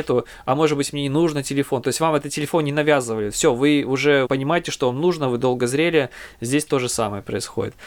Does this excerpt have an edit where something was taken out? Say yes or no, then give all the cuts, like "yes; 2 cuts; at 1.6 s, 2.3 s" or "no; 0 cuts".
yes; 1 cut; at 4.3 s